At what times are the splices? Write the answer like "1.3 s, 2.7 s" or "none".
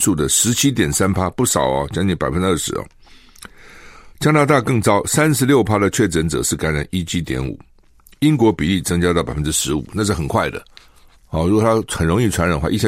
none